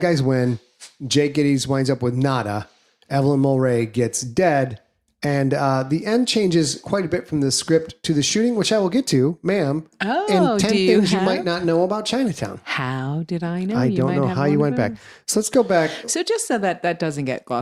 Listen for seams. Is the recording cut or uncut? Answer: uncut